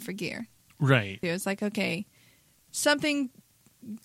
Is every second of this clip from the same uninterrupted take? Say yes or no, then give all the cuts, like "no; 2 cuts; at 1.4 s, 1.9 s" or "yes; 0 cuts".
no; 1 cut; at 1.2 s